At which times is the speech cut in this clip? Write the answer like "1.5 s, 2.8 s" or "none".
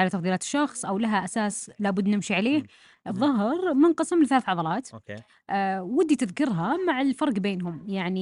3.1 s

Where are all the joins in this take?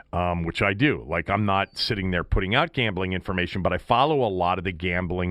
none

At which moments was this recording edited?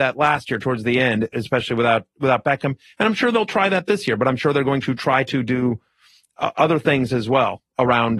none

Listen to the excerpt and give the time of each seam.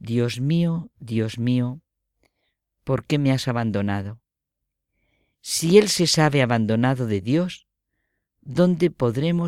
none

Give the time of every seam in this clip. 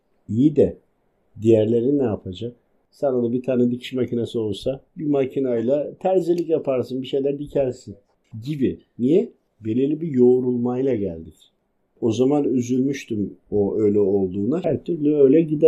4.9 s, 11.9 s, 14.6 s

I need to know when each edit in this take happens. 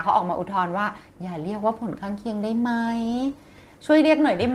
none

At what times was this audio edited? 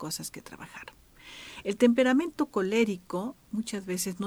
1.6 s

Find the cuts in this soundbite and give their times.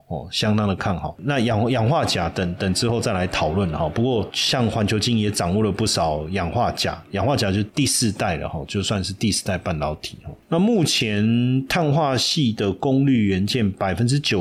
none

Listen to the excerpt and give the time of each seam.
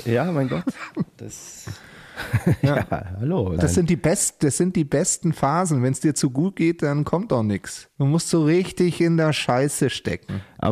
3.6 s

